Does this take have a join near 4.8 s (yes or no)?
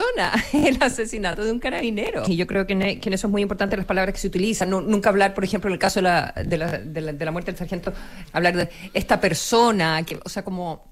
no